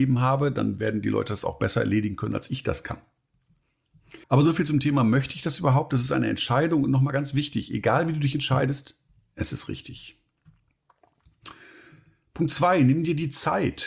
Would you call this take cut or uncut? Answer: cut